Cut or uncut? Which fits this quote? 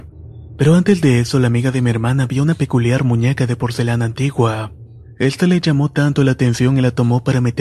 uncut